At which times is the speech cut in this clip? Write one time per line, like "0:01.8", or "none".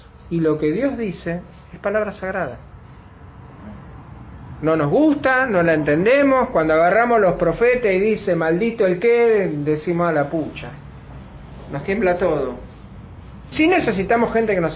0:13.5